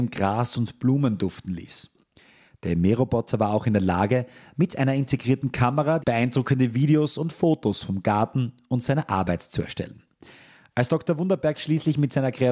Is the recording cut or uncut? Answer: cut